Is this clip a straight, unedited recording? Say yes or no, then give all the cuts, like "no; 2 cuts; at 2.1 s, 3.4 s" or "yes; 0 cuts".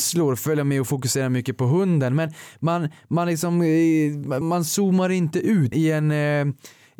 no; 2 cuts; at 4.4 s, 5.7 s